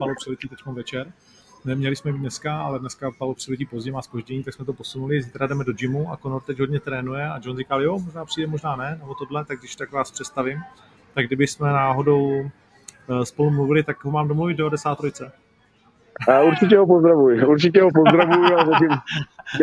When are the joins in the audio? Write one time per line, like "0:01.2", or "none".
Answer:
none